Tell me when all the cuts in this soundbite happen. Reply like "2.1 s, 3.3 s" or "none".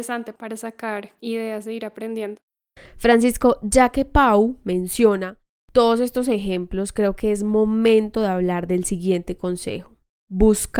none